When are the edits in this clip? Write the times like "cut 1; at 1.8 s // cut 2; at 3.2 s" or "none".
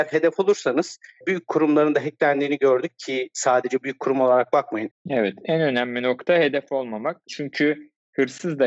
cut 1; at 4.9 s